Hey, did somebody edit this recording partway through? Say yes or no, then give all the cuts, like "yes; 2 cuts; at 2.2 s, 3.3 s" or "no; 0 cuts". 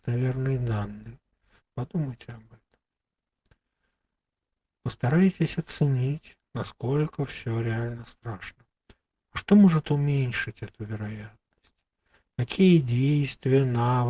yes; 1 cut; at 1.6 s